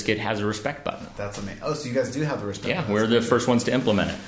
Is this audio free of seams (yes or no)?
yes